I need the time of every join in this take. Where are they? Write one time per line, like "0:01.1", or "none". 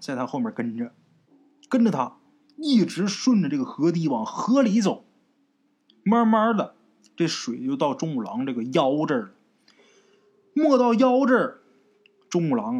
0:05.9